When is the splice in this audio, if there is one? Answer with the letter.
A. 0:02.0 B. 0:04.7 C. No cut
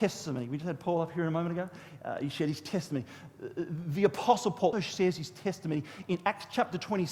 B